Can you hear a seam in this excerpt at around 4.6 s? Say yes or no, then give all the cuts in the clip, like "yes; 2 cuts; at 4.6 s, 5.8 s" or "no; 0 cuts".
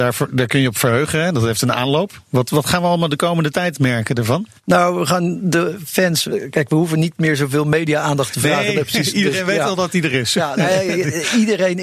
yes; 1 cut; at 4.6 s